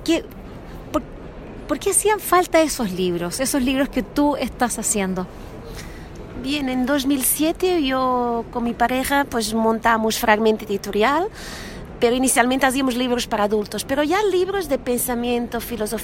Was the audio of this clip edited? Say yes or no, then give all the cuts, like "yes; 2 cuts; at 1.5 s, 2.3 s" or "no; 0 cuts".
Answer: no; 0 cuts